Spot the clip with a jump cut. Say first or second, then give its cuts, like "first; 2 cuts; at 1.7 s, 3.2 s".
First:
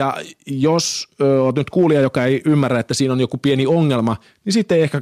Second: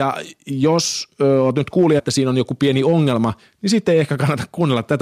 second; 1 cut; at 2.0 s